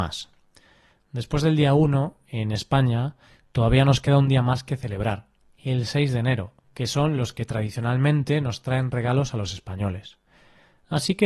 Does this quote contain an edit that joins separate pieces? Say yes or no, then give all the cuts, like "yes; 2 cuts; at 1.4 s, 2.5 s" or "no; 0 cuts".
yes; 1 cut; at 6.6 s